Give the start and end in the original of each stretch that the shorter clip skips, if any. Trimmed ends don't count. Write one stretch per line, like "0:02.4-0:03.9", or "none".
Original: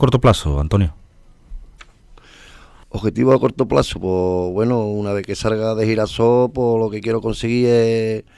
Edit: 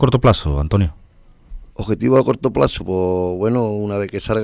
0:01.7-0:02.8